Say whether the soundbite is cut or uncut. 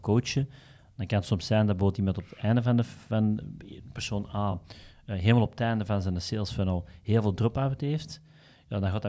uncut